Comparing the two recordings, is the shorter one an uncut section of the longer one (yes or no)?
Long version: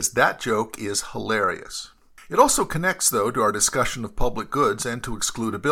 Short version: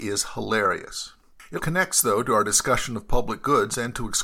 no